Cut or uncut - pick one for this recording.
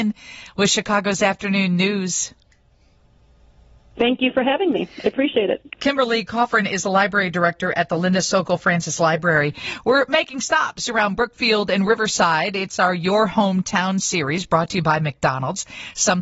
uncut